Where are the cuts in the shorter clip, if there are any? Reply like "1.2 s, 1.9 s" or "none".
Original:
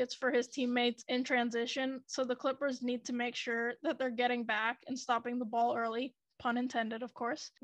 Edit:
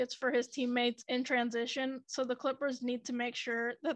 none